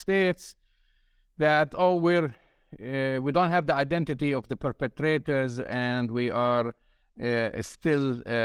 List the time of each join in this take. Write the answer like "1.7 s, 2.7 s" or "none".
none